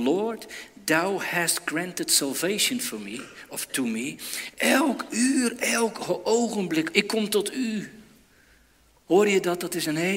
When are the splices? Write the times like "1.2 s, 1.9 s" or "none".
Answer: 4.5 s, 6.9 s